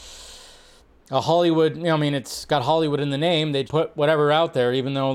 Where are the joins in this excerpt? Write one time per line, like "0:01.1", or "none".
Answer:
0:03.7